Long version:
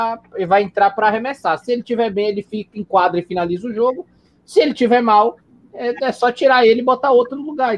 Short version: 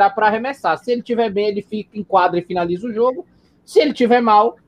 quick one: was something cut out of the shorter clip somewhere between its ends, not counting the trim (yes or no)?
no